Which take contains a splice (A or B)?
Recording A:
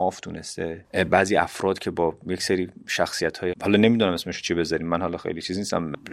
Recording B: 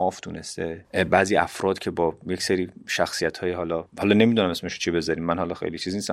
A